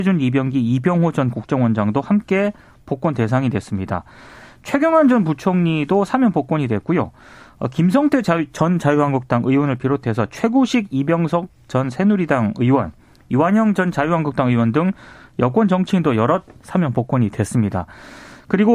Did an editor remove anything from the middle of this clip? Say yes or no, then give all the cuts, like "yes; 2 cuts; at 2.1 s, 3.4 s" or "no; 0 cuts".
no; 0 cuts